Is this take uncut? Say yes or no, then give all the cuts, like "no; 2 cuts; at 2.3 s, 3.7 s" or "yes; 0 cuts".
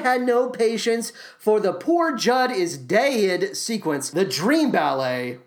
yes; 0 cuts